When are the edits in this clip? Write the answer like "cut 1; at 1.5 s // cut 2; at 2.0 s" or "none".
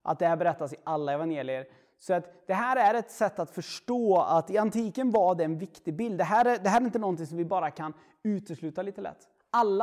none